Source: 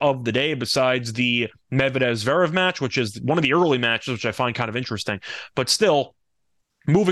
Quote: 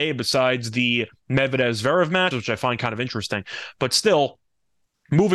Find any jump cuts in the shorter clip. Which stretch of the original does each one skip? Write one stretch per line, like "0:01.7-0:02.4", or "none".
0:02.7-0:04.1